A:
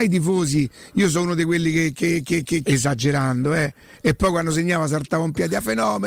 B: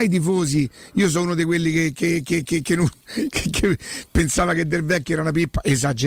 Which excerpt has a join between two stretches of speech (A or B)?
A